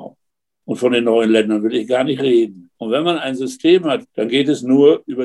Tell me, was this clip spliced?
yes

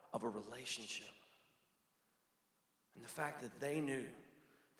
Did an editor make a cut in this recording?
no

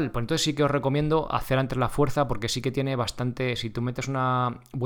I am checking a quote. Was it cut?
no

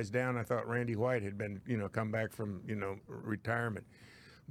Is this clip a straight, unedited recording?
no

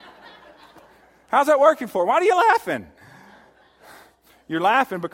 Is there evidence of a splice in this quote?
no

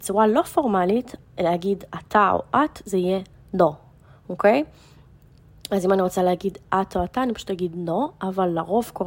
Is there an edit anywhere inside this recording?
yes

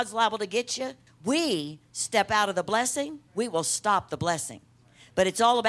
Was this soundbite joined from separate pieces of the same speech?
yes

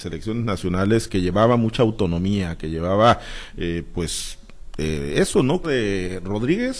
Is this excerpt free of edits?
no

